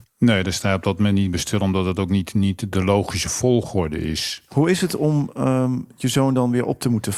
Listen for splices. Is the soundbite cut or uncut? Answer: uncut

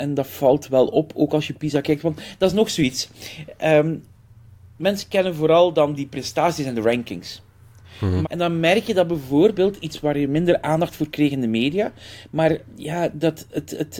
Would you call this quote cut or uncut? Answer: cut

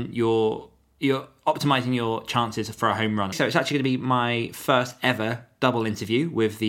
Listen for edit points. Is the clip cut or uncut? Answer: cut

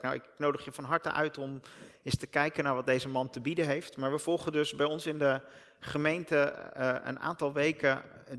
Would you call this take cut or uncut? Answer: uncut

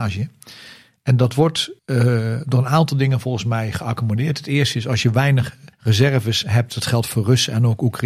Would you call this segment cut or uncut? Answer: cut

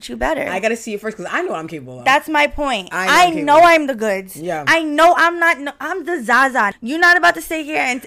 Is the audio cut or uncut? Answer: uncut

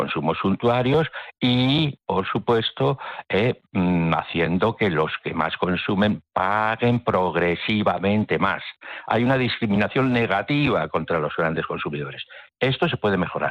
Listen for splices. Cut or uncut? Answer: uncut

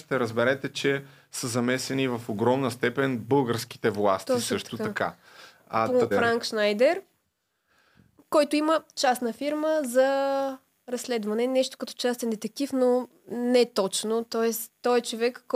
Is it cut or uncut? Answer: cut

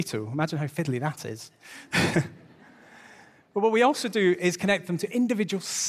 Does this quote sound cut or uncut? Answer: uncut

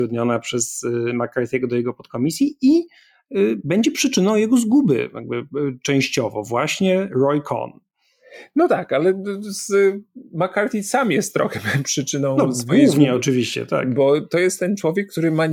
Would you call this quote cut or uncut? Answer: uncut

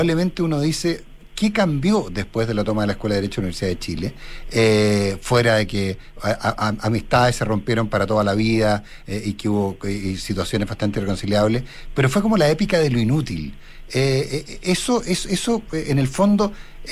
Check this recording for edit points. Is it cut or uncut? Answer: uncut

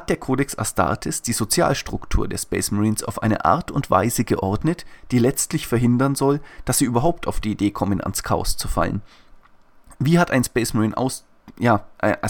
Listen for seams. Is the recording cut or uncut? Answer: uncut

